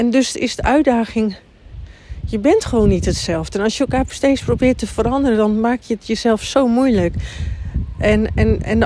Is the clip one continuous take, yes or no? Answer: yes